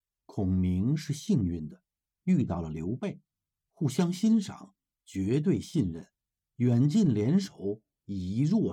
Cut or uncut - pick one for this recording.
uncut